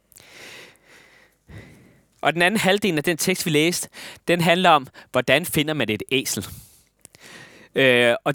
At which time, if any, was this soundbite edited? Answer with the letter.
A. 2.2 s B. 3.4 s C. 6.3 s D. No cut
A